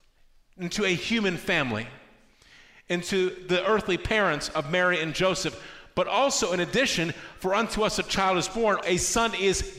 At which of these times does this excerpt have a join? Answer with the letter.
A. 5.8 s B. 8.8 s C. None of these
B